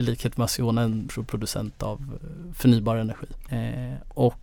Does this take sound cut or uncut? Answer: cut